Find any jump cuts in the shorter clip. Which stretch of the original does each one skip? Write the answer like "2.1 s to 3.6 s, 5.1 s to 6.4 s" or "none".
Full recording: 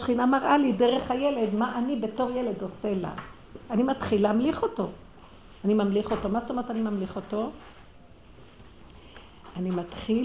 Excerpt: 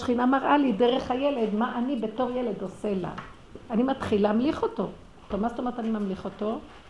5.3 s to 6.2 s